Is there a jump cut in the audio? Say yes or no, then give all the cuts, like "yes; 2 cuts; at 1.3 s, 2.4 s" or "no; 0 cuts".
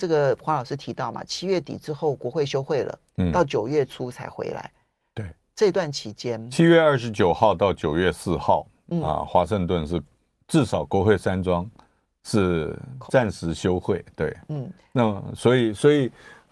yes; 1 cut; at 13.1 s